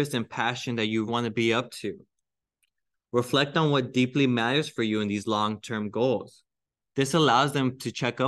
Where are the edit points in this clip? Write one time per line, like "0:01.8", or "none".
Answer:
0:01.1
0:06.8